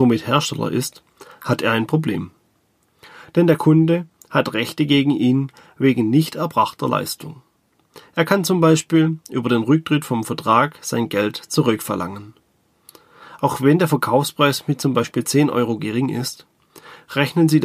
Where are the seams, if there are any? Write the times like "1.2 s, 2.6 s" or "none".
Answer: none